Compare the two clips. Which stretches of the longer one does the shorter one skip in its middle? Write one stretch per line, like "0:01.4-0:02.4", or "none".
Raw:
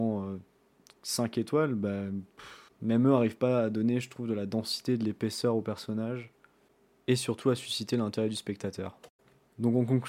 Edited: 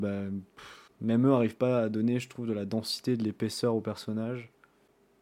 none